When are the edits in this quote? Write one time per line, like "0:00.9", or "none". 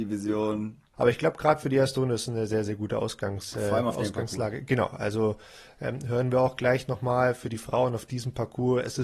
0:00.9